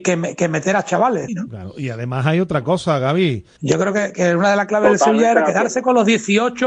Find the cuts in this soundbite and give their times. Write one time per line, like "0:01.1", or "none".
0:01.3
0:03.6